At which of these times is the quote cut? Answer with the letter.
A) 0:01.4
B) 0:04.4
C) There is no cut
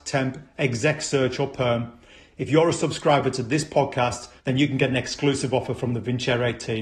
B